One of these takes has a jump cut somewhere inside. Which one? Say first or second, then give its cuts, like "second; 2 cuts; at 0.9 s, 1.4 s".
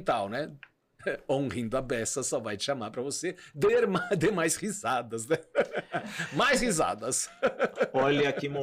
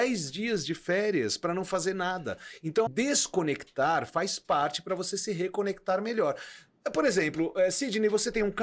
second; 1 cut; at 2.9 s